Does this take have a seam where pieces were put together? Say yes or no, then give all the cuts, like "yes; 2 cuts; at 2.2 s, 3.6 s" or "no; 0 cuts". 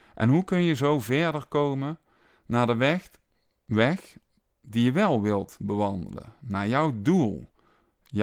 no; 0 cuts